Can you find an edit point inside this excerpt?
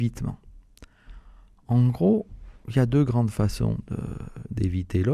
no; 0 cuts

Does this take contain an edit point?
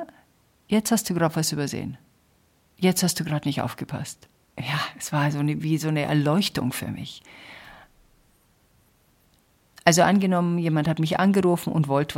yes; 1 cut; at 4.5 s

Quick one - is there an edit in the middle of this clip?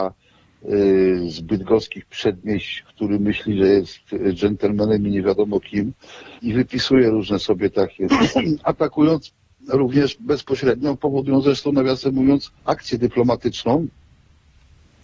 yes; 3 cuts; at 6.4 s, 8.1 s, 12.6 s

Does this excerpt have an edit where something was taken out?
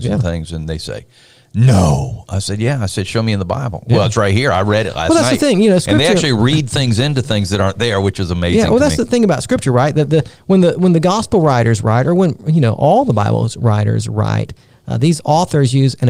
no; 0 cuts

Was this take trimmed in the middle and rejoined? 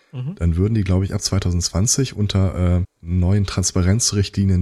yes; 1 cut; at 2.8 s

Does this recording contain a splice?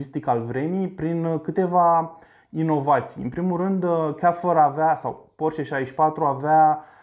no; 0 cuts

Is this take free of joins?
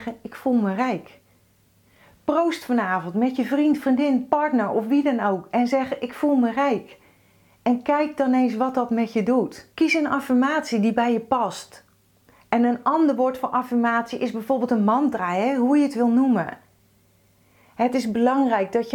no; 1 cut; at 9.7 s

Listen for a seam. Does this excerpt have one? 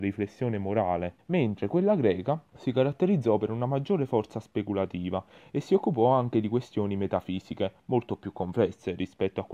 yes; 2 cuts; at 1.2 s, 2.5 s

